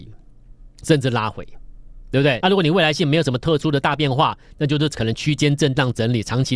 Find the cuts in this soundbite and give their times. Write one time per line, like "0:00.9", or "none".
0:02.4